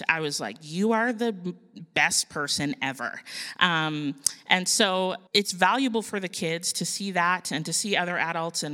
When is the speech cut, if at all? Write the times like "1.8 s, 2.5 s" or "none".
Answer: 5.3 s